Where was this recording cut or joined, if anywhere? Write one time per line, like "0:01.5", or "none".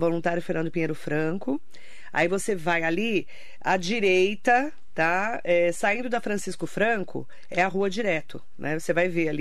none